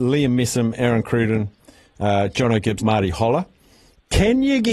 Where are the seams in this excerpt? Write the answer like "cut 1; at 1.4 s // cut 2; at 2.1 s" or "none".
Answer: cut 1; at 2.8 s